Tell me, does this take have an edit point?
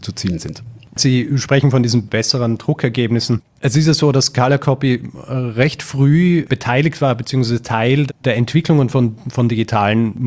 yes; 1 cut; at 8.1 s

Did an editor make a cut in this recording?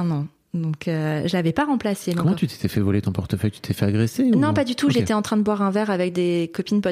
no; 0 cuts

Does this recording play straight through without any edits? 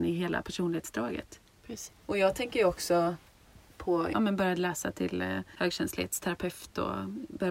no; 2 cuts; at 1.9 s, 4.1 s

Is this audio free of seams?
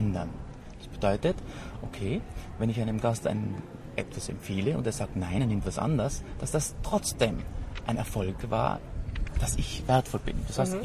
yes; 0 cuts

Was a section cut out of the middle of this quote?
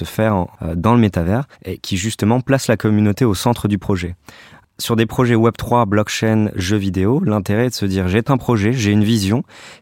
yes; 1 cut; at 1.5 s

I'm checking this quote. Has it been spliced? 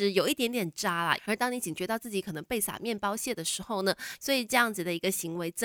yes; 2 cuts; at 1.2 s, 4.2 s

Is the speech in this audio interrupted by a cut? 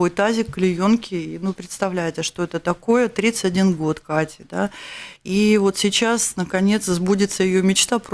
no; 0 cuts

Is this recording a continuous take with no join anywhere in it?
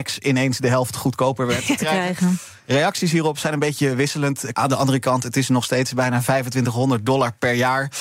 no; 2 cuts; at 1.8 s, 4.5 s

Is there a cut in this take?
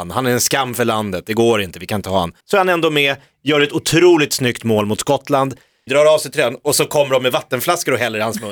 yes; 2 cuts; at 2.4 s, 5.9 s

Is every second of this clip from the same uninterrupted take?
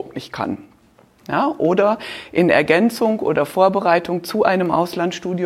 no; 1 cut; at 1.2 s

